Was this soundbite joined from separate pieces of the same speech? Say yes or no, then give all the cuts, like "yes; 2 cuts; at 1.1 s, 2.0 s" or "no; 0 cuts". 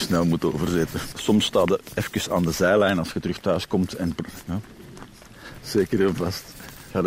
yes; 2 cuts; at 1.1 s, 5.6 s